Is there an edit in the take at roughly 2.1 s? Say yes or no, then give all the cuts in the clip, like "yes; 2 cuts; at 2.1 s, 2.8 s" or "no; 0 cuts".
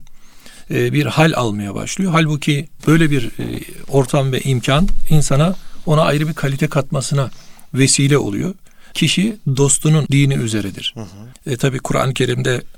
no; 3 cuts; at 8.9 s, 10.1 s, 11.3 s